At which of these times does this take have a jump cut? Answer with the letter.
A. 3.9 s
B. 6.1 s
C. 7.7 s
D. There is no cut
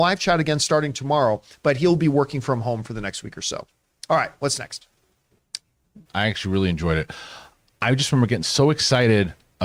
B